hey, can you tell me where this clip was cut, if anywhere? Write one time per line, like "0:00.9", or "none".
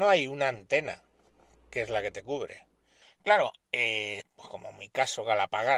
0:03.0
0:04.2